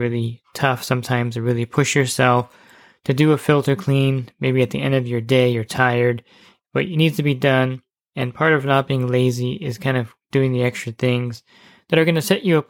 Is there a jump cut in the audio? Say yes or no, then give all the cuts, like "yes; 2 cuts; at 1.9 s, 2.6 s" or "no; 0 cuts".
no; 0 cuts